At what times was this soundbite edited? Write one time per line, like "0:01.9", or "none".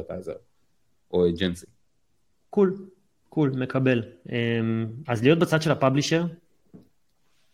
0:05.1